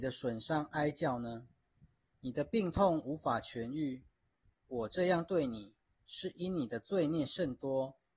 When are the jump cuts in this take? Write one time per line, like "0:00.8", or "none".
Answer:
none

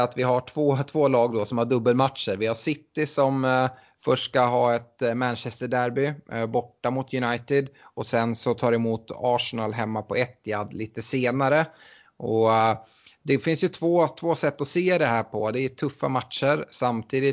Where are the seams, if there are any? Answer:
none

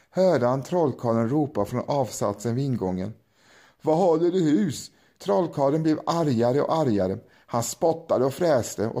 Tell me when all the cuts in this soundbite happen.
0:05.2

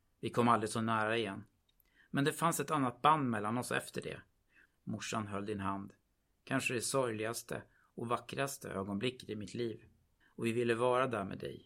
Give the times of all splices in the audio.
0:04.6
0:10.2

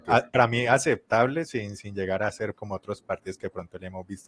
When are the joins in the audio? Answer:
0:02.5

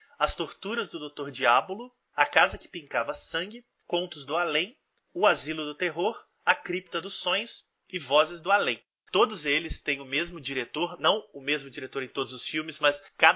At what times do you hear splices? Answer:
0:09.1

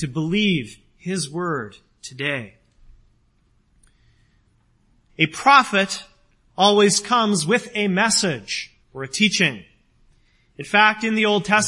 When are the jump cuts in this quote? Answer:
0:05.1
0:08.8

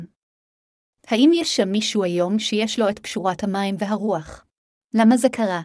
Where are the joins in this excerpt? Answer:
0:04.7

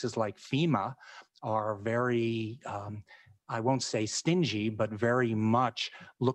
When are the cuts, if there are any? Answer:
none

